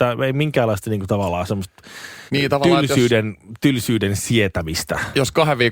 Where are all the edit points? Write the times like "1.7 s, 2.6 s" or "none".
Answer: 2.3 s